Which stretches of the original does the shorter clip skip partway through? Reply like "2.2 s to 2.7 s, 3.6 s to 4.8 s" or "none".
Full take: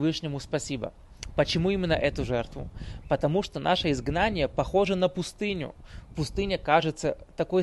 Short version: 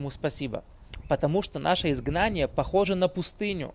1.3 s to 3.0 s